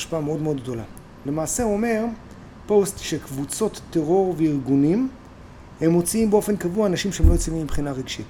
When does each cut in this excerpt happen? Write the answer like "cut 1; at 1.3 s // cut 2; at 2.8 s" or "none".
cut 1; at 1.3 s

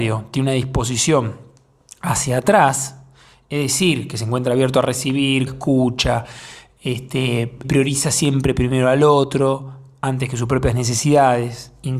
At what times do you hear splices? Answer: cut 1; at 5.5 s // cut 2; at 7.6 s

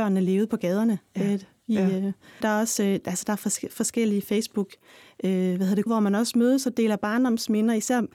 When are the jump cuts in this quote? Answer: cut 1; at 2.4 s // cut 2; at 5.9 s

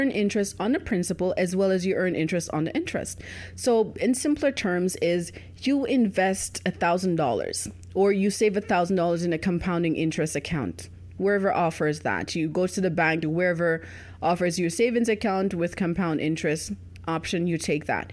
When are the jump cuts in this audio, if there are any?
cut 1; at 13.2 s

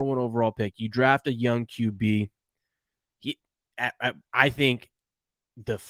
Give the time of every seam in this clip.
cut 1; at 4.3 s

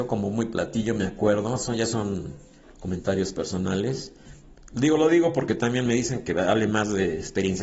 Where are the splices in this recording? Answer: none

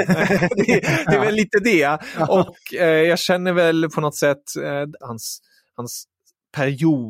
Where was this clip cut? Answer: cut 1; at 2.5 s // cut 2; at 5.0 s

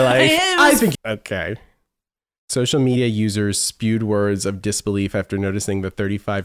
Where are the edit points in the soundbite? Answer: cut 1; at 0.9 s

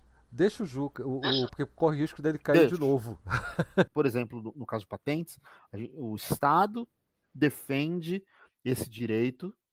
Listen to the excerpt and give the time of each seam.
cut 1; at 1.5 s // cut 2; at 3.9 s

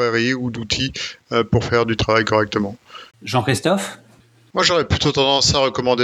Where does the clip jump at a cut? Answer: cut 1; at 3.1 s

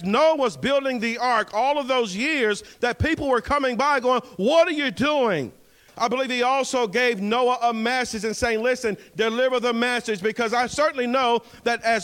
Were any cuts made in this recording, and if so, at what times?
cut 1; at 5.9 s

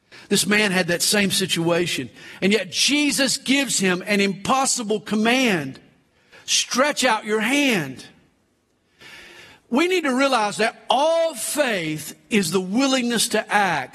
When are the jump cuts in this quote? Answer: none

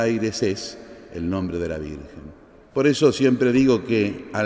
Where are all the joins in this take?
cut 1; at 2.7 s

